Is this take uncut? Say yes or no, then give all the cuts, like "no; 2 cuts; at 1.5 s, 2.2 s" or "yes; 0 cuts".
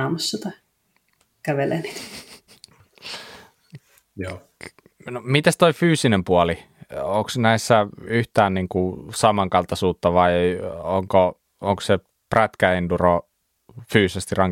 yes; 0 cuts